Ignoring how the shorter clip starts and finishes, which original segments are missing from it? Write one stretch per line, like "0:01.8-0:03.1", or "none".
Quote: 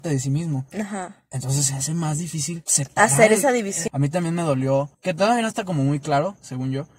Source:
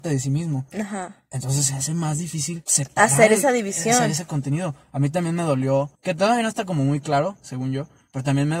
0:03.9-0:04.9